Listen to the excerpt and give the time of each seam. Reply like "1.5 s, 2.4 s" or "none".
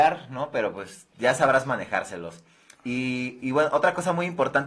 none